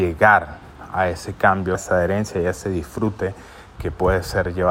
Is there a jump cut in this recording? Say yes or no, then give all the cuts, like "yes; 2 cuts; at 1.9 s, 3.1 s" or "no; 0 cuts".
yes; 2 cuts; at 1.7 s, 3.8 s